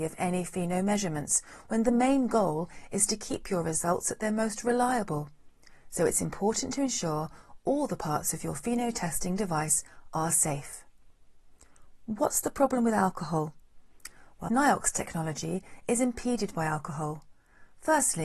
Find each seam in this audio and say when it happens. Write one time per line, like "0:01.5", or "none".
0:14.5